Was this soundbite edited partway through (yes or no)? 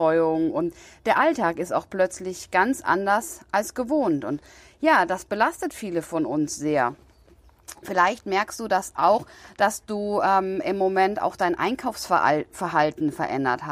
no